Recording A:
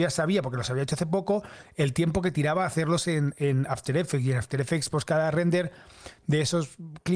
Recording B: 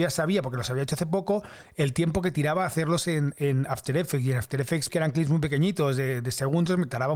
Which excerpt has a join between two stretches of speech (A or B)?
B